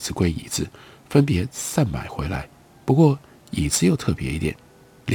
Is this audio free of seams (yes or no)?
yes